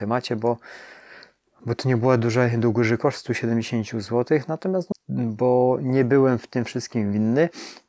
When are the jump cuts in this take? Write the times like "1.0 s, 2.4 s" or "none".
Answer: 4.9 s